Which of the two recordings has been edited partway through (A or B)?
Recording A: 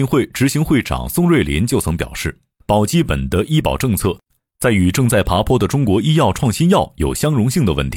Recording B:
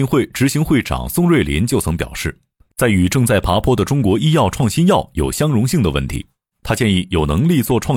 B